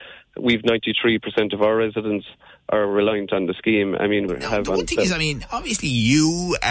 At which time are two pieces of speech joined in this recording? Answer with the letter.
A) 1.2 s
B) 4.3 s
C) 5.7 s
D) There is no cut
B